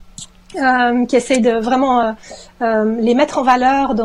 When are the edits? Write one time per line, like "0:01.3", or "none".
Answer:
none

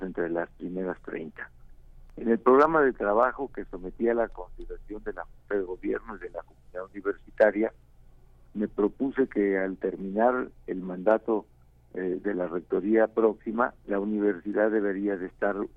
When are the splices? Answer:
0:13.8

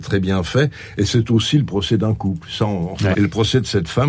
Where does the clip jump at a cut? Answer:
0:03.1

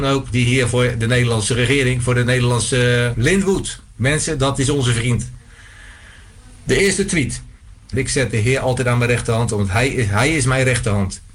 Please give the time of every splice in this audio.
0:03.1
0:07.9

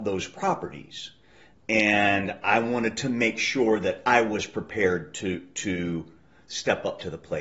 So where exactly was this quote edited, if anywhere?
0:01.5

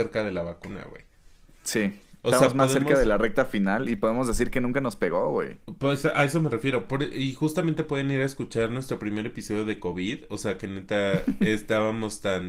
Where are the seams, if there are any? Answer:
none

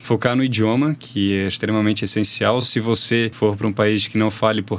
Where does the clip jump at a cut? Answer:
none

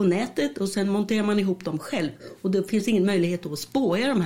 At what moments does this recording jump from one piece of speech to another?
none

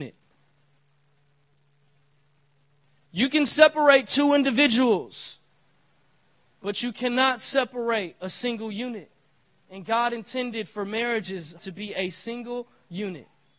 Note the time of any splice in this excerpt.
0:11.6

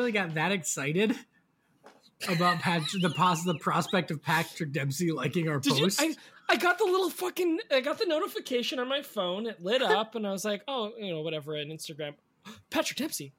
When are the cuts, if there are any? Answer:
none

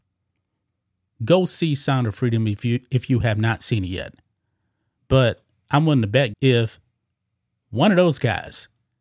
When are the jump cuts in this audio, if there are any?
0:01.2
0:05.0
0:06.3

